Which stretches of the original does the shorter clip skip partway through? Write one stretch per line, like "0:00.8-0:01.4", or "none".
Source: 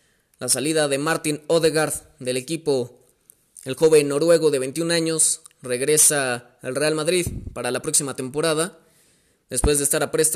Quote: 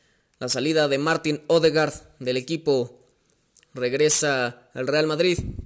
0:03.6-0:05.5